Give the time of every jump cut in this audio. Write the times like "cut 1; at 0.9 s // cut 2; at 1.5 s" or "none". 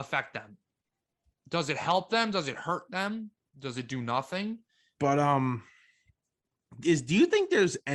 cut 1; at 5.0 s